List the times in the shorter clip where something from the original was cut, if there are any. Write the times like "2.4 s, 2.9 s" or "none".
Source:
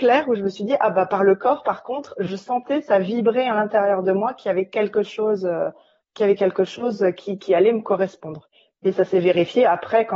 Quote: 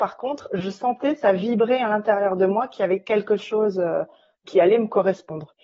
4.4 s